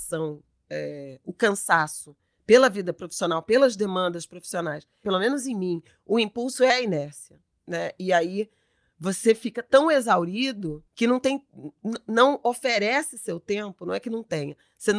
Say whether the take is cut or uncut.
cut